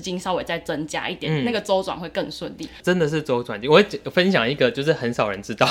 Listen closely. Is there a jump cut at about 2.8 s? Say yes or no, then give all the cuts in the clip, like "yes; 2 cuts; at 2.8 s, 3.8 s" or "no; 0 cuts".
no; 0 cuts